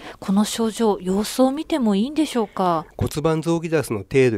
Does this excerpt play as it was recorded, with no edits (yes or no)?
no